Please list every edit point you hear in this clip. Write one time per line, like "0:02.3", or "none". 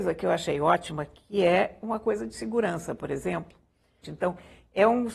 0:04.0